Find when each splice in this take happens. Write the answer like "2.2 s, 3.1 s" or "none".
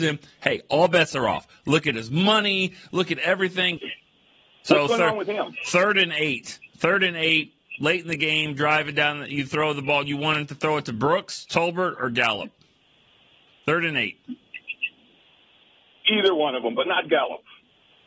3.8 s